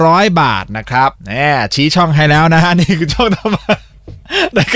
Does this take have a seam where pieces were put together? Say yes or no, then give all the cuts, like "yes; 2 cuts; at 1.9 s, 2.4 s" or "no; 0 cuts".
yes; 1 cut; at 1.2 s